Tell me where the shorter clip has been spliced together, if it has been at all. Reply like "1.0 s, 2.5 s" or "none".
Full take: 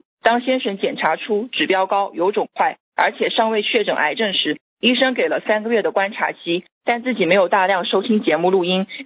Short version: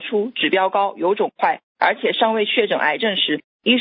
none